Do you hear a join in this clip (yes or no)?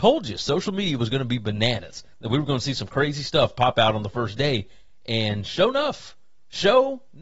no